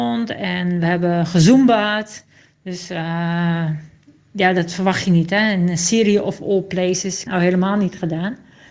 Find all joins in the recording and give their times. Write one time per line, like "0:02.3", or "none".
0:07.3